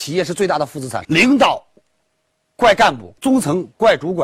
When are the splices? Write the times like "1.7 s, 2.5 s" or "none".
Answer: 1.0 s, 3.2 s